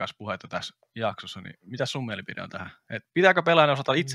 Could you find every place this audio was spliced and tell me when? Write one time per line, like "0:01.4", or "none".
none

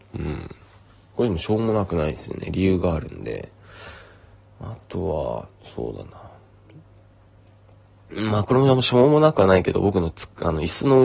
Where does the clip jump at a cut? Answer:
none

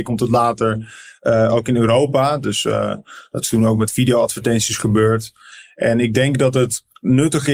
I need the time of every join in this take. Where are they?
none

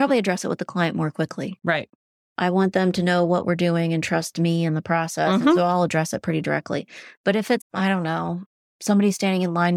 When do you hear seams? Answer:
0:07.6

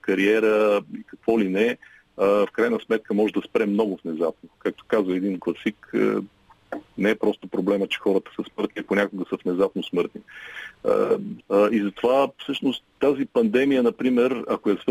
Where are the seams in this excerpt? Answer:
0:11.4
0:12.9

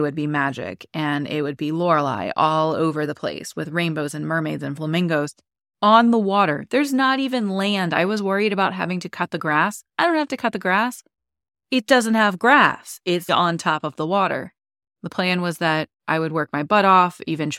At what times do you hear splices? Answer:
0:13.3
0:14.9

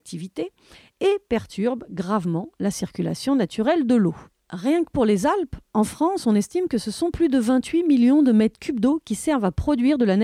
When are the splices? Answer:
none

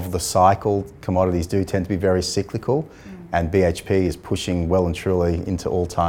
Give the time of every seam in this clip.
none

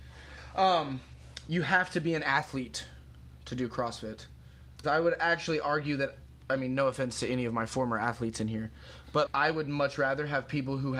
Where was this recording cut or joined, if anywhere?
0:04.8
0:09.3

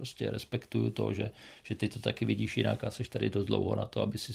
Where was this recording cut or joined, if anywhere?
none

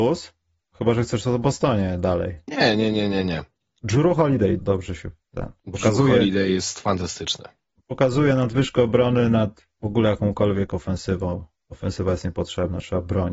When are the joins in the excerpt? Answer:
0:04.6

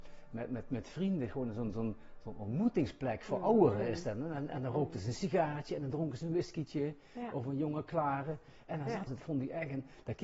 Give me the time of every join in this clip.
0:09.1

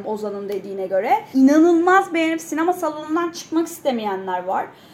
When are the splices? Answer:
0:01.3

